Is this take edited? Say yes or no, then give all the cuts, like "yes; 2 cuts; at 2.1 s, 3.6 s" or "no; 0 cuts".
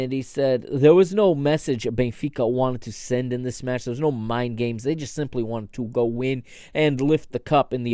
no; 0 cuts